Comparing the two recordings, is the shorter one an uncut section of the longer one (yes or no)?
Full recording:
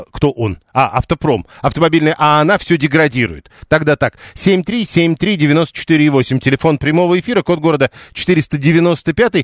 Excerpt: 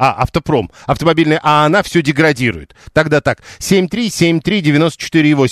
yes